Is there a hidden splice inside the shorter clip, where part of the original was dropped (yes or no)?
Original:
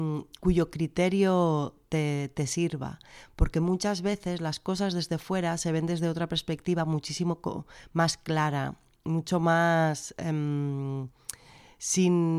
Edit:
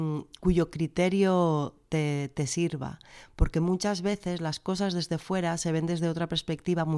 no